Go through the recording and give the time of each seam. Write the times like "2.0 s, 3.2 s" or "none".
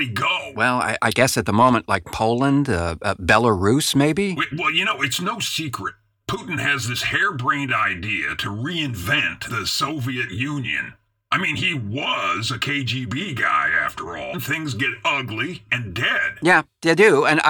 14.3 s, 15.7 s

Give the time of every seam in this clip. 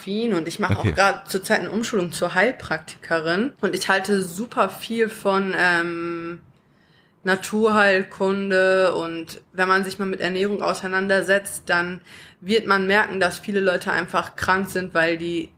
3.6 s

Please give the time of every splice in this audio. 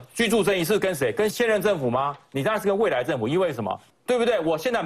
1.3 s, 3.9 s

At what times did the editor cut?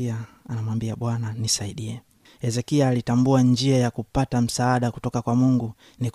none

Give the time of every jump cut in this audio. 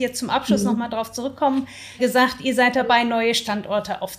2.0 s

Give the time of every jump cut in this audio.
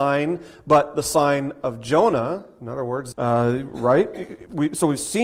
3.1 s

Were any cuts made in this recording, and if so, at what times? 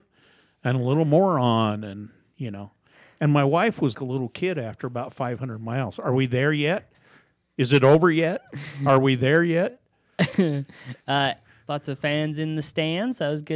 3.9 s, 11.7 s

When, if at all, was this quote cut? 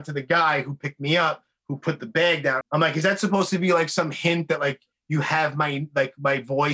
2.6 s

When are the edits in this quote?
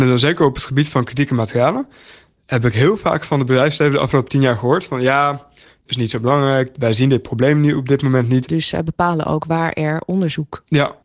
5.9 s, 8.5 s

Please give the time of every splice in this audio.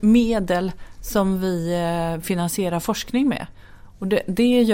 none

